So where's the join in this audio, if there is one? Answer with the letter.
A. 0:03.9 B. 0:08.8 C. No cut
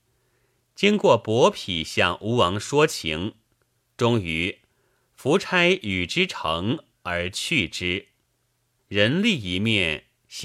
B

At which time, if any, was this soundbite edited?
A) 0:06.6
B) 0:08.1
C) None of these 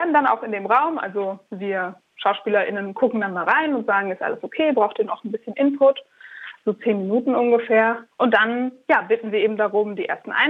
B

